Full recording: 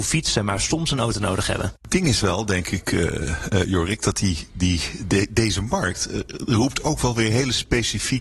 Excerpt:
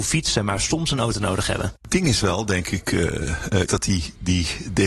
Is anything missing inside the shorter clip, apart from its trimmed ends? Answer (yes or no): yes